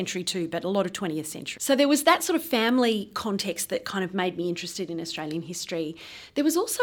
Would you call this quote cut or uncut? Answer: cut